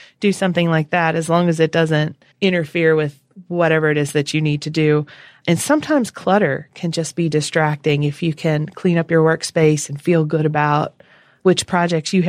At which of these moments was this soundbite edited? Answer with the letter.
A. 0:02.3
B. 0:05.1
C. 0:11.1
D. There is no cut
A